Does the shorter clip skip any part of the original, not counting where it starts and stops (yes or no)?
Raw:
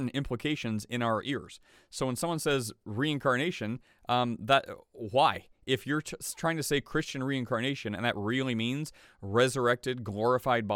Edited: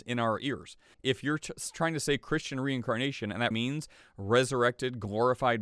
yes